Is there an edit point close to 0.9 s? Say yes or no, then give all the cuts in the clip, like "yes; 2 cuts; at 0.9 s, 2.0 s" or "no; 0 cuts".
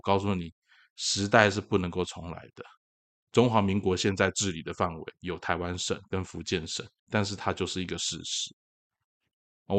no; 2 cuts; at 3.2 s, 7.0 s